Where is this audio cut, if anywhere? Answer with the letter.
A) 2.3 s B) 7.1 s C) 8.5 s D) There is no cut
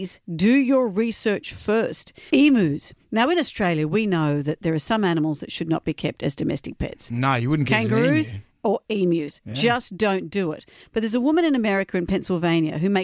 A